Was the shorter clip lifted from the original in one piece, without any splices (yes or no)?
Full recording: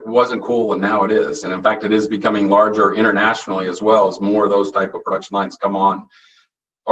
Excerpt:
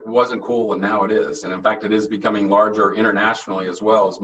yes